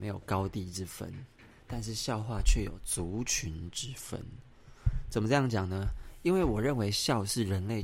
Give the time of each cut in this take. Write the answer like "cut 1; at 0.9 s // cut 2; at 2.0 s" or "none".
none